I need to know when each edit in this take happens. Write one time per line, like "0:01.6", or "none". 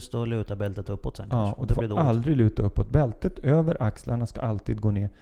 none